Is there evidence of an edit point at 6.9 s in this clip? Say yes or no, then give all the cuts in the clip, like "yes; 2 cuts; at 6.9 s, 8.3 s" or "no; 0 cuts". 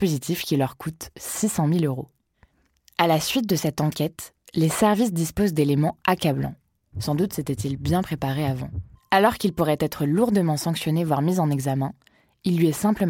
yes; 2 cuts; at 6.9 s, 9.0 s